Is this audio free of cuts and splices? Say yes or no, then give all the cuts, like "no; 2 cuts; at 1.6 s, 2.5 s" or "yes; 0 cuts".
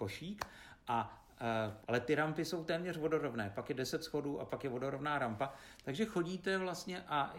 no; 1 cut; at 1.8 s